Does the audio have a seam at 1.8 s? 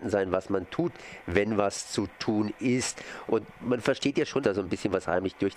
no; 2 cuts; at 3.3 s, 4.4 s

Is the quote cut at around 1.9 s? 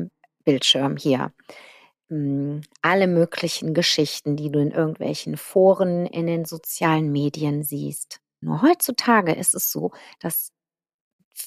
no; 1 cut; at 8.4 s

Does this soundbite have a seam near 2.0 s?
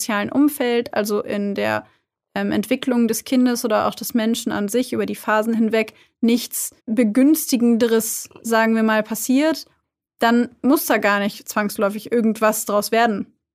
no; 1 cut; at 6.8 s

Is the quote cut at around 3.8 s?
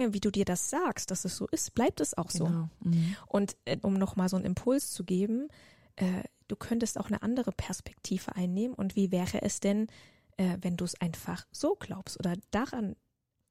yes; 1 cut; at 3.8 s

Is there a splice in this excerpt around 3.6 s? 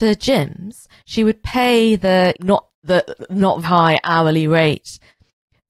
yes; 2 cuts; at 2.3 s, 3.6 s

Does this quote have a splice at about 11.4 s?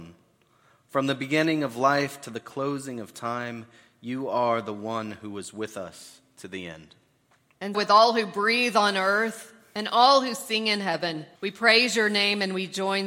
yes; 2 cuts; at 7.7 s, 11.4 s

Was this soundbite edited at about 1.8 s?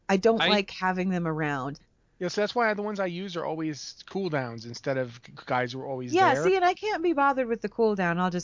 yes; 1 cut; at 1.8 s

